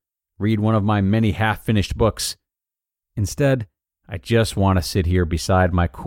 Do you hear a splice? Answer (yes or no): no